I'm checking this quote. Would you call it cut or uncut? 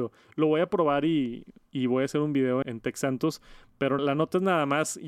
cut